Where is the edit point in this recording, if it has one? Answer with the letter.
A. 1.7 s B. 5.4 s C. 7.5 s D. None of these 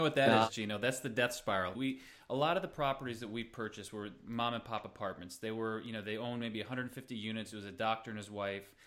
A